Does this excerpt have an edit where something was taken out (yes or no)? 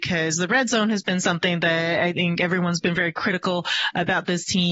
no